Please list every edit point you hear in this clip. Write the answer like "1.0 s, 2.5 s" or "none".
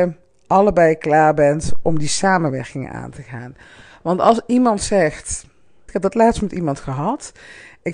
5.9 s